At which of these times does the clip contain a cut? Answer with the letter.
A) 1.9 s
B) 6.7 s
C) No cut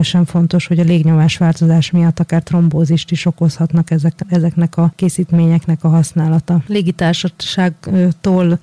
C